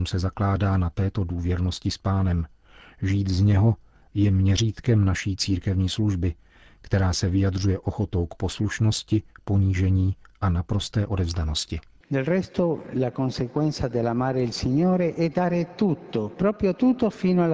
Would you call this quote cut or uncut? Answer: uncut